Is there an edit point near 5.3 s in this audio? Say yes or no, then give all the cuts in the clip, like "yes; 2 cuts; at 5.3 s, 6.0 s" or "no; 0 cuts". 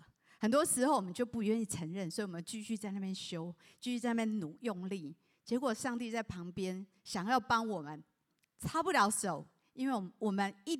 no; 0 cuts